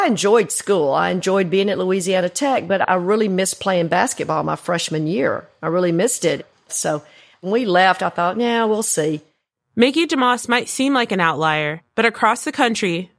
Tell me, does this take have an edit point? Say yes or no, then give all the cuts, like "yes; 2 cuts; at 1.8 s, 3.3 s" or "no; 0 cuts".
yes; 1 cut; at 6.7 s